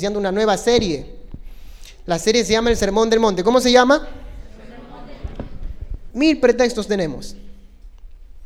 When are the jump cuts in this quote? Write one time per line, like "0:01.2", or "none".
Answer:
0:06.1